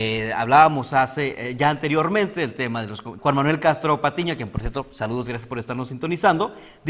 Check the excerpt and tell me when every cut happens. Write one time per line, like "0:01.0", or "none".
0:03.2